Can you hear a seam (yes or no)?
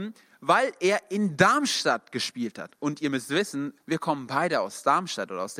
yes